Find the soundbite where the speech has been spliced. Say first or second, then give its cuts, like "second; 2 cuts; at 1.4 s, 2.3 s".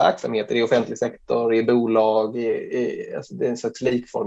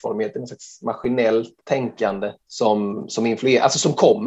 second; 1 cut; at 2.4 s